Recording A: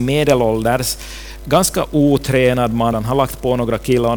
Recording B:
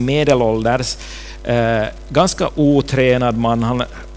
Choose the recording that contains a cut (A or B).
A